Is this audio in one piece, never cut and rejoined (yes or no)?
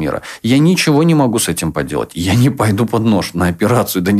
yes